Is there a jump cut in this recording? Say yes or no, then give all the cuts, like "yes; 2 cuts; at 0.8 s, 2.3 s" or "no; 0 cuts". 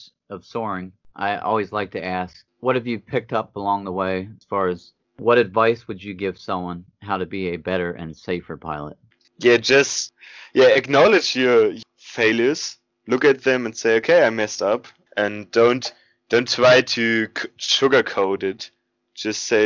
no; 0 cuts